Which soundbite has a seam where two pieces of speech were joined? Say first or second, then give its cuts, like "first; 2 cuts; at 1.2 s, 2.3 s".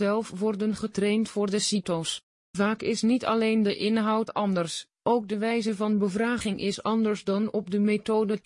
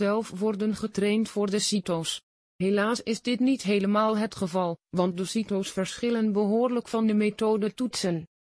first; 1 cut; at 2.3 s